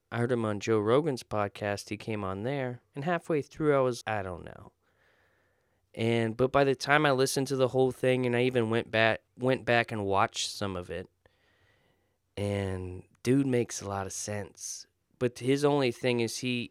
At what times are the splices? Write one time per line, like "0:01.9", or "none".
0:04.0
0:09.3

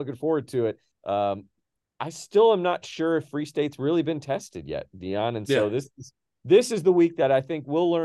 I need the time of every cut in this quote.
0:00.9

